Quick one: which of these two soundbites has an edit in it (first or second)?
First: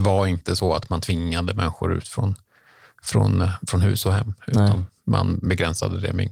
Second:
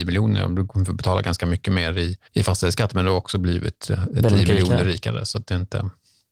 second